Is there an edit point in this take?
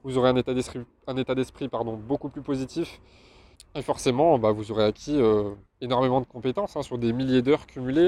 yes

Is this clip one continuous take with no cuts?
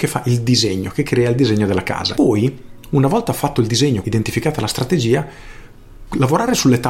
no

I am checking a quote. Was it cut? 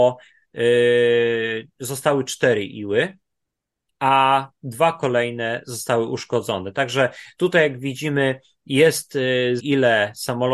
yes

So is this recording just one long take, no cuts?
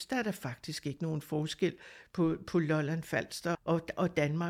no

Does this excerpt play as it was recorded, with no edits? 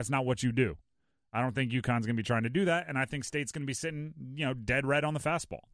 yes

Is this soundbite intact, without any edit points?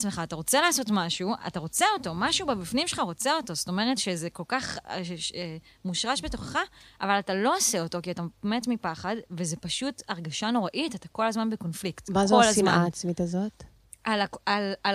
yes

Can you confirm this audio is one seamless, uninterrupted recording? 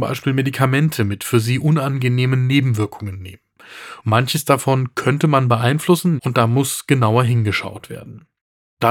no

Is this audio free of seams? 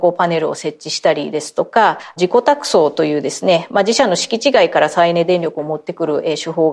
yes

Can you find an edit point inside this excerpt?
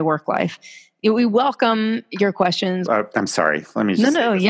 yes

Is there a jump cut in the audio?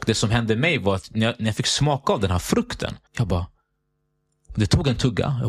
yes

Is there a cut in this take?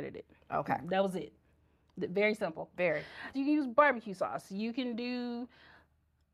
yes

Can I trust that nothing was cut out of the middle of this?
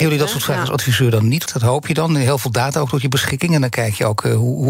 no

